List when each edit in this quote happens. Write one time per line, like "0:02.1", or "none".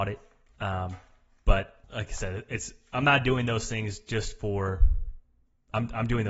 0:01.8

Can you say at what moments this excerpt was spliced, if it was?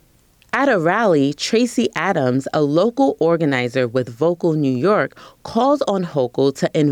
none

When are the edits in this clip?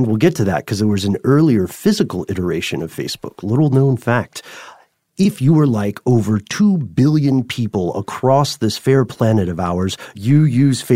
none

